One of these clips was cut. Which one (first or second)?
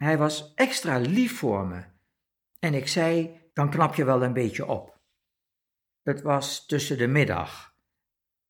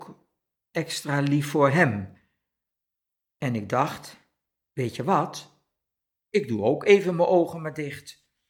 first